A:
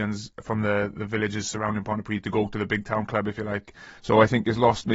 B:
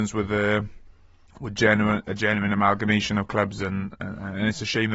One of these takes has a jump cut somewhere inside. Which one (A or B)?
A